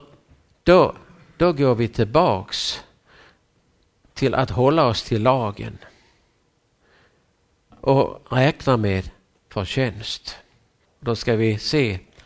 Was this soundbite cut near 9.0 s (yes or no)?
no